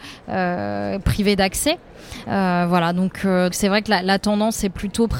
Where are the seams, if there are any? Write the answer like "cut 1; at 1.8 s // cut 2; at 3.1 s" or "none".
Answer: cut 1; at 2.2 s // cut 2; at 3.5 s